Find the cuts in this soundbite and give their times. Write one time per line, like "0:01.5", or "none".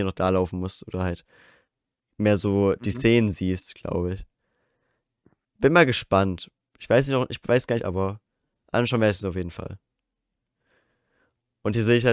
0:07.8

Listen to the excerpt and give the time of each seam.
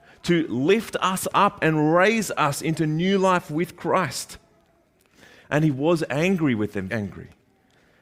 0:05.4
0:06.9

